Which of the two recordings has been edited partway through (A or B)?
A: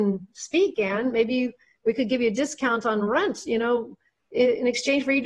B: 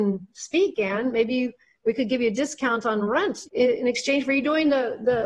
B